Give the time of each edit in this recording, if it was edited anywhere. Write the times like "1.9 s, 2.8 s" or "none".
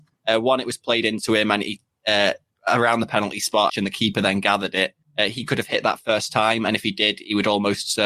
3.7 s